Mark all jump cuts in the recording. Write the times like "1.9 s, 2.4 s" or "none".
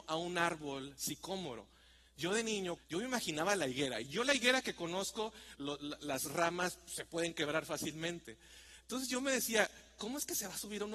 2.8 s, 5.5 s